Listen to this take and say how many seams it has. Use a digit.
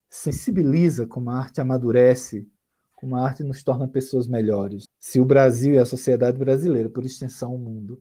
1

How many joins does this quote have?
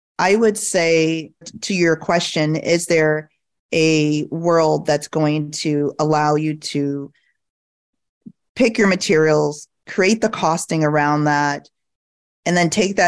1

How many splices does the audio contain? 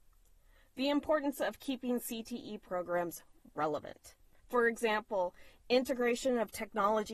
1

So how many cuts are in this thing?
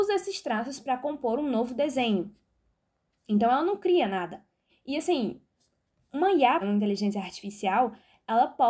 2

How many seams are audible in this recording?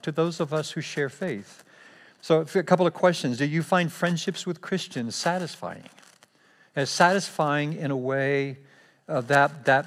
0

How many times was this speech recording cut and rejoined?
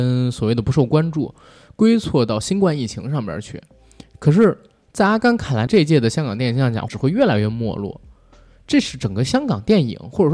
2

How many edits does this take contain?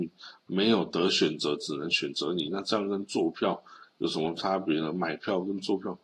0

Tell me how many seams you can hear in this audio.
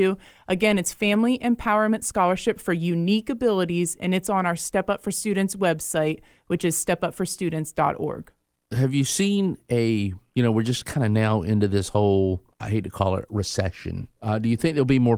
0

